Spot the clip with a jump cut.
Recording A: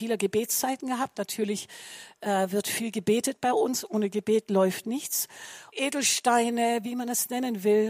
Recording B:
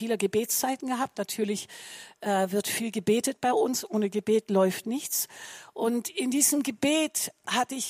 A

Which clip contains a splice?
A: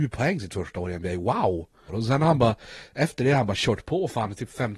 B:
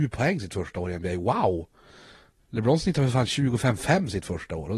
A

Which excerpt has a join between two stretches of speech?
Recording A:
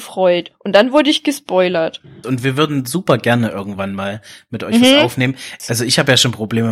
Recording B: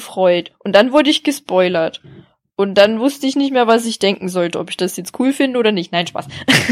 A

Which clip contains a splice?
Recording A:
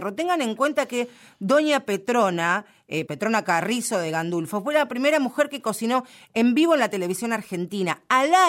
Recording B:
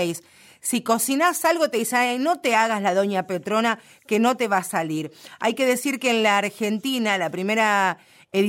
A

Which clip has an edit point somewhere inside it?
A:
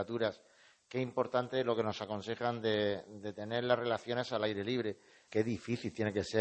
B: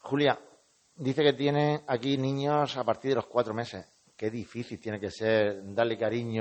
A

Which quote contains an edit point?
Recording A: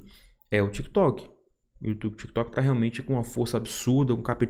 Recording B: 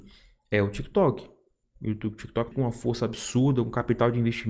B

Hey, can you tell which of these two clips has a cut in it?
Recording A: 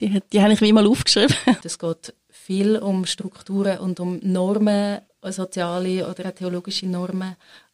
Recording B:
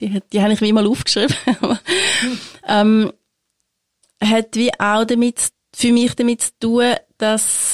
A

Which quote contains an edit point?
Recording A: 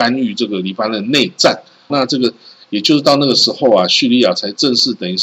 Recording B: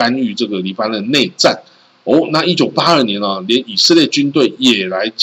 A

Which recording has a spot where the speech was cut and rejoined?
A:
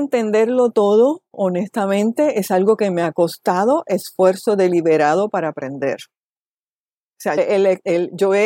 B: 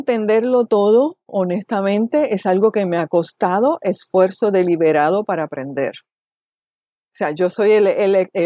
A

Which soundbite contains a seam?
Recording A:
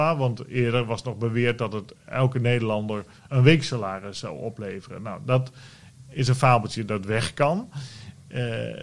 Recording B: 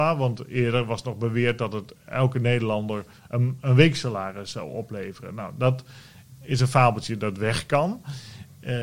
A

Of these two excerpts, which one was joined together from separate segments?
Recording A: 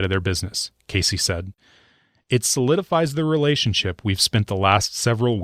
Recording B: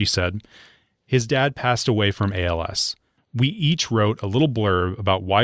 B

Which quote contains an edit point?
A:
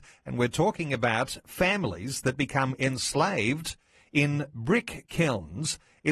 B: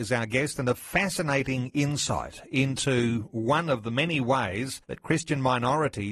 B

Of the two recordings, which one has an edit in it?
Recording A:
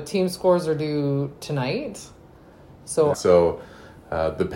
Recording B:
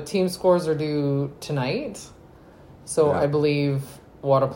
A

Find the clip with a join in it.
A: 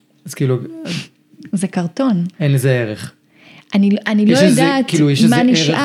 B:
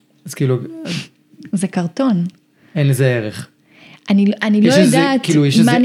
A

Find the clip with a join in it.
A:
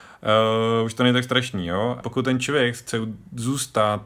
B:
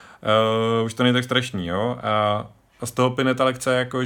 A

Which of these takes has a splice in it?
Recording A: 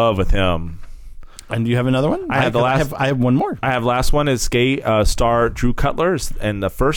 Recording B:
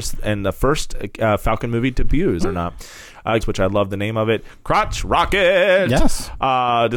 B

